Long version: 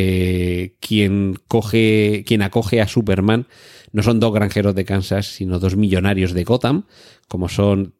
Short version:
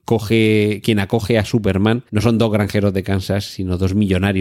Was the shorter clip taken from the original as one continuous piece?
no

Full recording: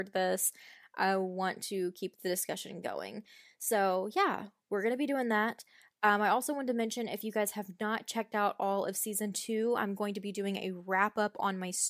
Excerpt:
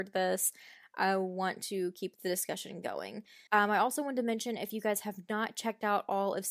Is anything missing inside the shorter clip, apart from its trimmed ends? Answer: yes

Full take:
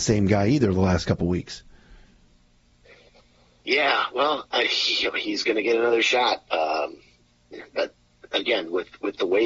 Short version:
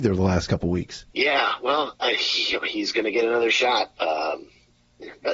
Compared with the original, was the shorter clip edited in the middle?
yes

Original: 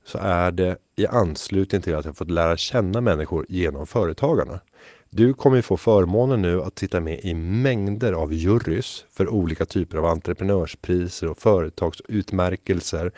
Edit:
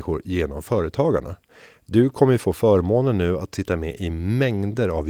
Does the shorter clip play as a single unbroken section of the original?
yes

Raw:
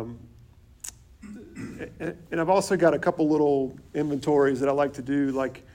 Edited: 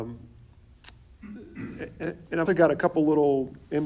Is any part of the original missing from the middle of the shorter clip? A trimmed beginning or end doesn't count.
yes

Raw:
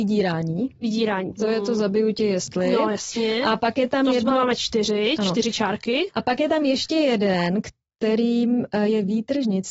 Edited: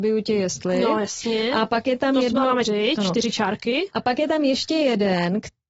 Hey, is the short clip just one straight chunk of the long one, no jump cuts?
no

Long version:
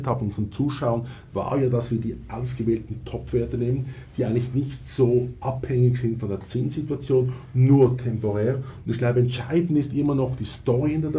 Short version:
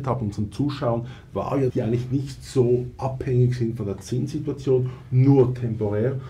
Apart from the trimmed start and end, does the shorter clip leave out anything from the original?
yes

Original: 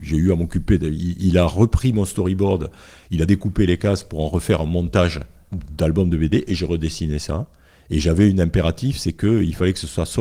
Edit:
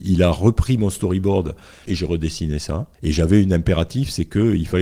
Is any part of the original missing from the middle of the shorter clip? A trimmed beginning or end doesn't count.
yes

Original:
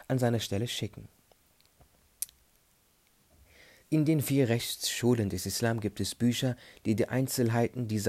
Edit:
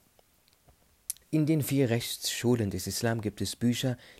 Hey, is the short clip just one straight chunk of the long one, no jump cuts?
no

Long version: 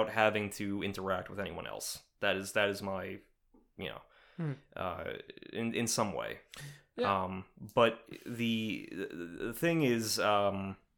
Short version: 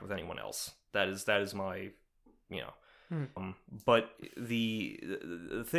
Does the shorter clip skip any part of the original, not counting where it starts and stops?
yes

